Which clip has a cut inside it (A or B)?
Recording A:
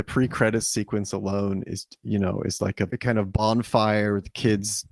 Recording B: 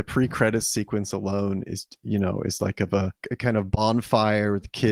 A